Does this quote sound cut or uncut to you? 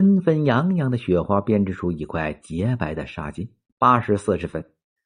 cut